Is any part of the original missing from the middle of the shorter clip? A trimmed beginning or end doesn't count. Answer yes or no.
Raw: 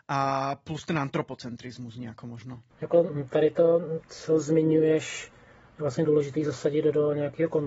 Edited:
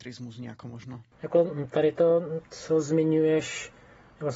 no